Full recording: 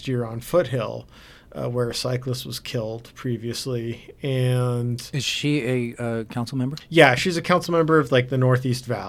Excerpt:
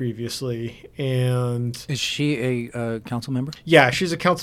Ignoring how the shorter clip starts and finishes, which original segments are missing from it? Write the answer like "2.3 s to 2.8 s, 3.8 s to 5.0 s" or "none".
none